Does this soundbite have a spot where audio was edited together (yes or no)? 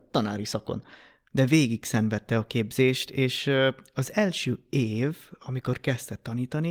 no